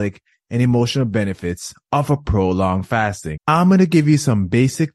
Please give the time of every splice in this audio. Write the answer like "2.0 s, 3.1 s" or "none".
3.4 s